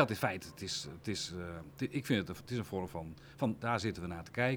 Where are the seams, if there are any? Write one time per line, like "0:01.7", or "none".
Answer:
0:03.6